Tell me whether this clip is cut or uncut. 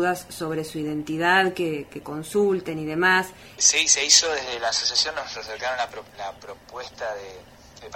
cut